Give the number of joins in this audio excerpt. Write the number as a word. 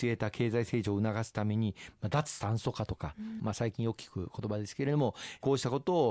one